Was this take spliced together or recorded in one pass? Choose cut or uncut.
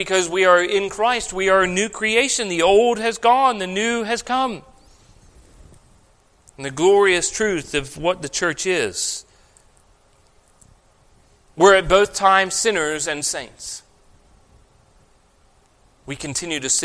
uncut